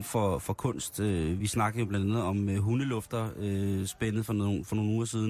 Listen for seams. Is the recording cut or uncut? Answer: uncut